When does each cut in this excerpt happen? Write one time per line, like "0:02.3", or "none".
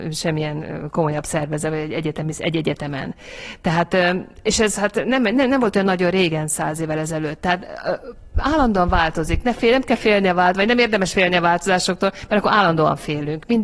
none